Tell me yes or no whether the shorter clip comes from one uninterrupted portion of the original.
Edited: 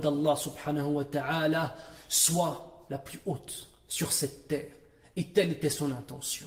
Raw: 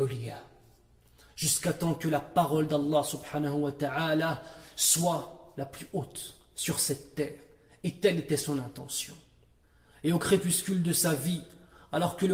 yes